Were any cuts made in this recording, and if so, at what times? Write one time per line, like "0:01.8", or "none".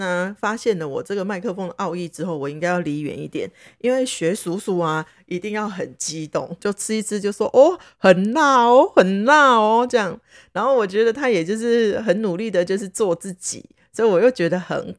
0:06.6